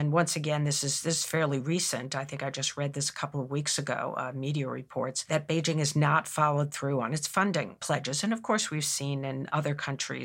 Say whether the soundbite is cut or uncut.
uncut